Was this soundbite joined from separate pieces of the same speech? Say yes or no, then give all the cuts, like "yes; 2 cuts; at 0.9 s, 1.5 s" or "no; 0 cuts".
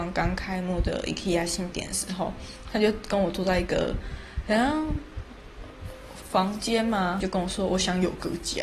yes; 2 cuts; at 1.7 s, 7.2 s